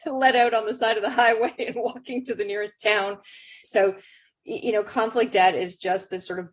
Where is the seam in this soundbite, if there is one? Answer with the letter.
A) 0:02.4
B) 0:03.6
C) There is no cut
B